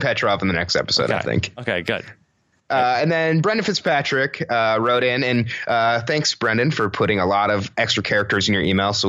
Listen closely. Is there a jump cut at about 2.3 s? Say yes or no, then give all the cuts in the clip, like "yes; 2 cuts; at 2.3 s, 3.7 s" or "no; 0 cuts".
no; 0 cuts